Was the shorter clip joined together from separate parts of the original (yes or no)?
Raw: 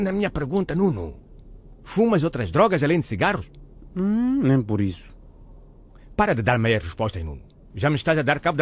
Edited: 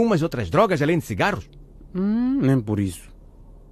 no